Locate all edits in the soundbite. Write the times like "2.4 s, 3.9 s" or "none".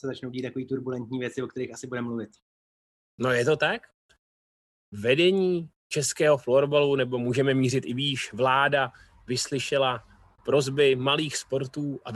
none